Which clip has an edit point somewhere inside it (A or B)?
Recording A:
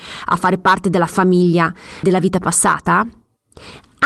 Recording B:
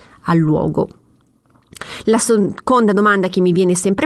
A